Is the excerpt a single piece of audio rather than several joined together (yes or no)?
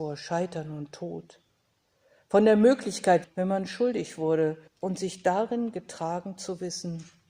no